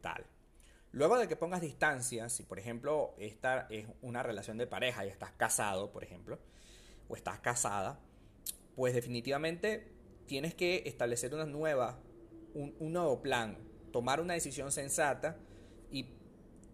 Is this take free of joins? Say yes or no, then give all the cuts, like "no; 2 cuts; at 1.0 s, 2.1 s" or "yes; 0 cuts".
yes; 0 cuts